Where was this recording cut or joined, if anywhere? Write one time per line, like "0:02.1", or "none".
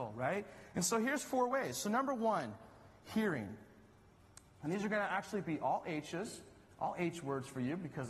none